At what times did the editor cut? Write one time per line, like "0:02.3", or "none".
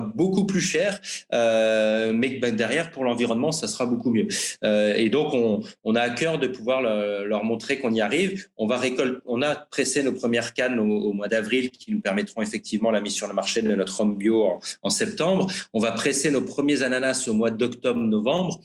none